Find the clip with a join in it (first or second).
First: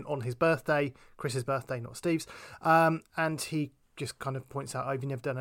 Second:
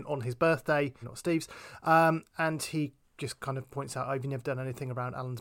second